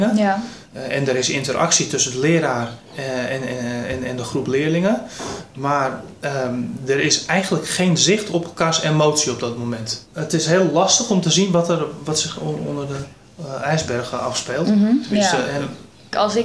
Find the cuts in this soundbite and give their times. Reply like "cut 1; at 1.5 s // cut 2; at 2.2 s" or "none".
none